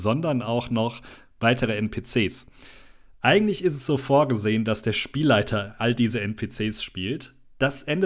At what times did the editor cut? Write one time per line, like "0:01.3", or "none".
none